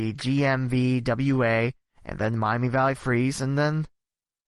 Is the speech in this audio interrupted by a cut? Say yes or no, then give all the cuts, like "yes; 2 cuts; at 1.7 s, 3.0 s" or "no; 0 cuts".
no; 0 cuts